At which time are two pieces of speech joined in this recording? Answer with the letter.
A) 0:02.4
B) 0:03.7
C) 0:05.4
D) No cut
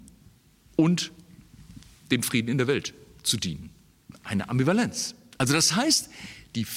C